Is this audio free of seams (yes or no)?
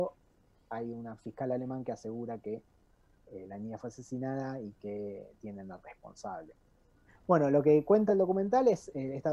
no